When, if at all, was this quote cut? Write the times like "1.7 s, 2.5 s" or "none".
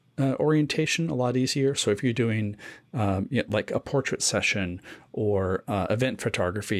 none